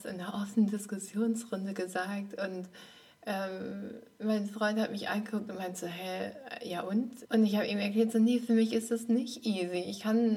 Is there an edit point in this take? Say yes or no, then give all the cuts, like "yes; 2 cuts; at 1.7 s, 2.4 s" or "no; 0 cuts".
yes; 1 cut; at 7.2 s